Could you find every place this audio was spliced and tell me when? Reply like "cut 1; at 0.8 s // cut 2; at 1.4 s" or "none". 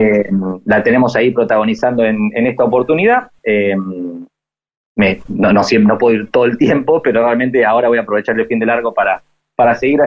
cut 1; at 3.4 s